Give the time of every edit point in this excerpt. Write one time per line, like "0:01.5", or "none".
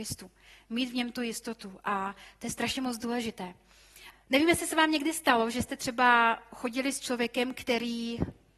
0:04.1